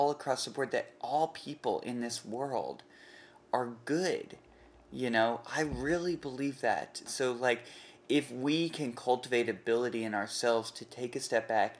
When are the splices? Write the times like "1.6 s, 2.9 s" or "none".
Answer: 7.1 s